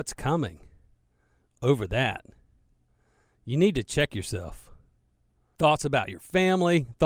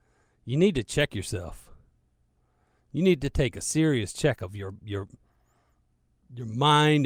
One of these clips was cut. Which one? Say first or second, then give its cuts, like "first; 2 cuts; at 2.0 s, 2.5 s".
first; 1 cut; at 5.6 s